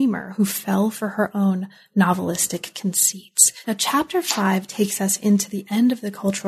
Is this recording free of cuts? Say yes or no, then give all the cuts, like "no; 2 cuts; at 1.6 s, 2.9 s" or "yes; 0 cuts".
no; 1 cut; at 3.6 s